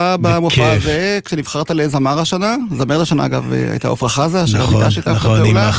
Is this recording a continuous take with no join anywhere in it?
yes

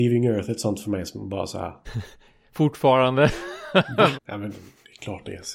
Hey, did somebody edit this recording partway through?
yes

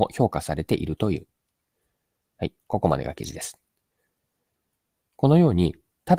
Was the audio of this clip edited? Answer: no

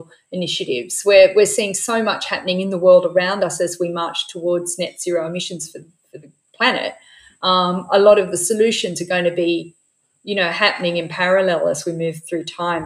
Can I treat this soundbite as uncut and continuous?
yes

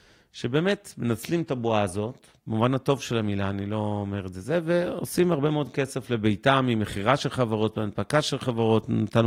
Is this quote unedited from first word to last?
no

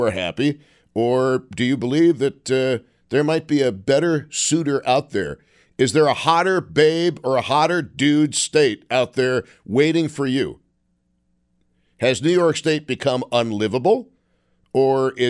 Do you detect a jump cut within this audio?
no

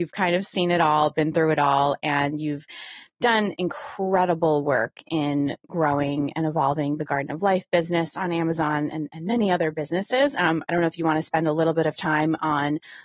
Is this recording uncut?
yes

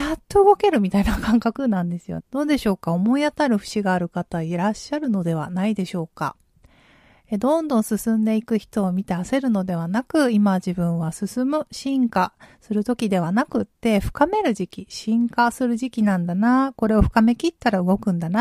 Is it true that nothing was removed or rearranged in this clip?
no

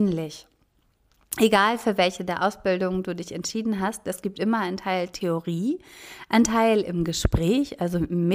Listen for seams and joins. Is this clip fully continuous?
yes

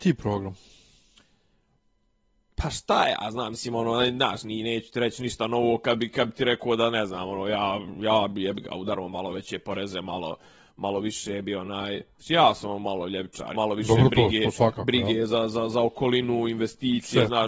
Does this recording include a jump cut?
yes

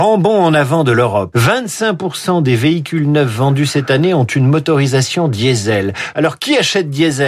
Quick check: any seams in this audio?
yes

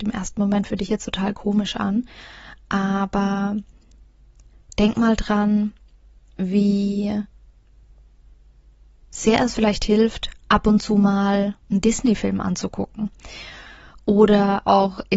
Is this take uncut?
no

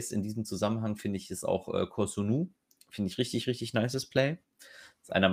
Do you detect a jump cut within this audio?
no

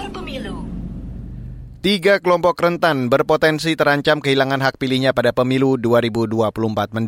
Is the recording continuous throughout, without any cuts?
yes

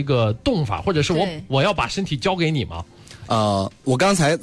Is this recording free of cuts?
yes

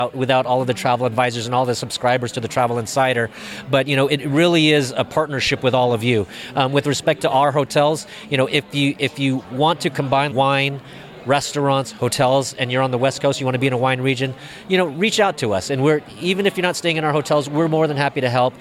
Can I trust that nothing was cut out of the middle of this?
no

